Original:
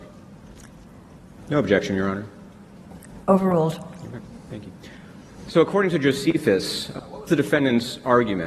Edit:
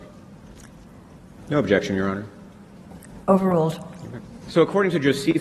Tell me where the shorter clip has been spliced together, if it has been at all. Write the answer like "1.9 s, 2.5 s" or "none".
4.4 s